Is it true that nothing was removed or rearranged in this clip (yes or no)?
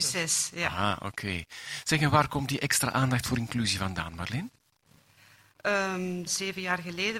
no